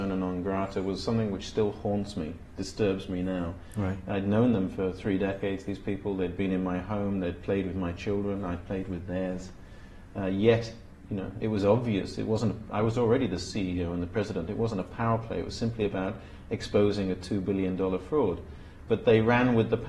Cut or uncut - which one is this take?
uncut